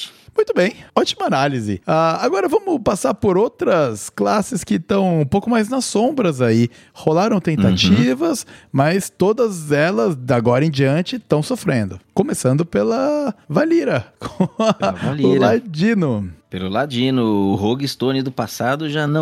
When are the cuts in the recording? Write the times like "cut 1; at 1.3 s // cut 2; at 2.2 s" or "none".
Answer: none

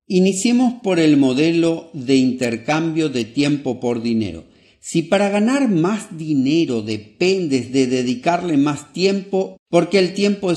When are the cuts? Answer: cut 1; at 9.5 s

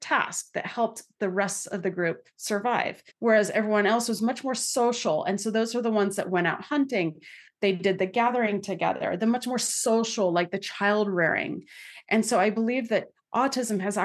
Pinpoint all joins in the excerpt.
cut 1; at 3.1 s

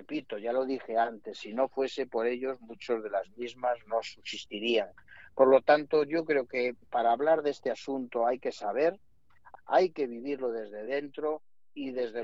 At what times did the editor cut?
cut 1; at 9.5 s

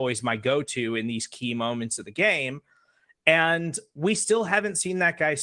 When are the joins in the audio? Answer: none

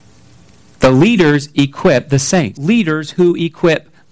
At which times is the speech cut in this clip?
cut 1; at 2.6 s

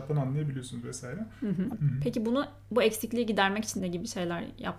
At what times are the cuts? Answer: cut 1; at 1.7 s // cut 2; at 3.8 s

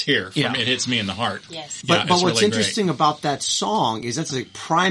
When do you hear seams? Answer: cut 1; at 1.5 s

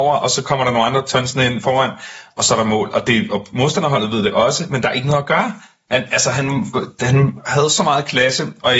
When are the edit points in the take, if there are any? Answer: none

